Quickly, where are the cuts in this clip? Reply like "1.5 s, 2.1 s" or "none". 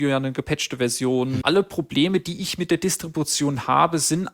1.4 s